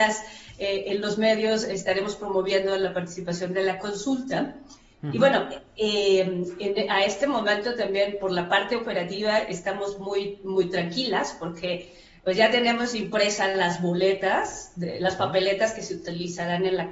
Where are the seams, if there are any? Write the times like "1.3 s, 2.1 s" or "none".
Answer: none